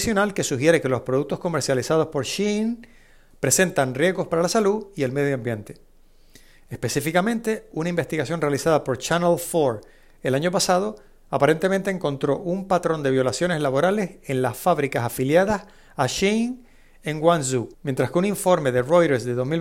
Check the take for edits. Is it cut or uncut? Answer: cut